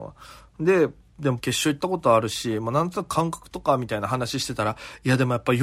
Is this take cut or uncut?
cut